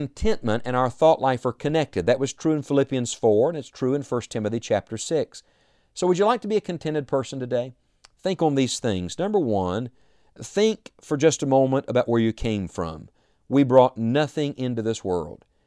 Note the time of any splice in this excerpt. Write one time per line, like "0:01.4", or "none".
none